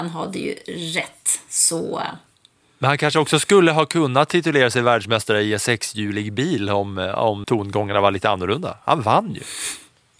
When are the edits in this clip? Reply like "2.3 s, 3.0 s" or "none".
7.4 s

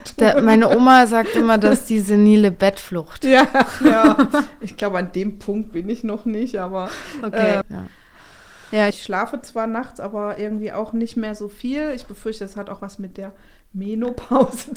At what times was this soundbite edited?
7.6 s, 8.9 s

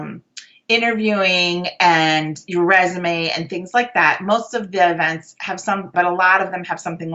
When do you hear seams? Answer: 5.9 s

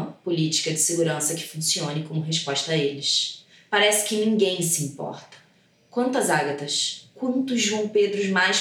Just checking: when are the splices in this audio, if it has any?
none

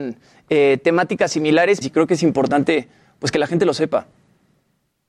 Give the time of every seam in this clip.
1.8 s

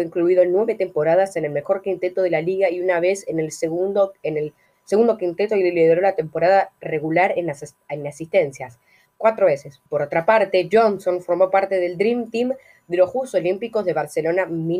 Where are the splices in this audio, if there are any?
9.9 s

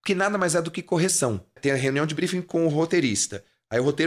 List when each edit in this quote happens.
1.6 s

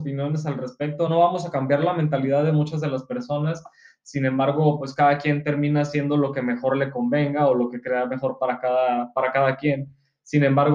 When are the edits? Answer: none

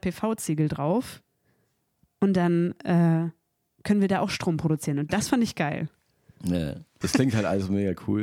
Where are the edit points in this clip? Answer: 7.0 s

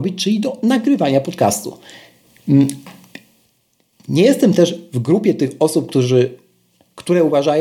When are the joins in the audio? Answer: none

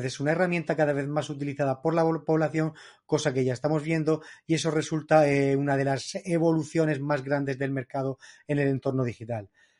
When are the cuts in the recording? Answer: none

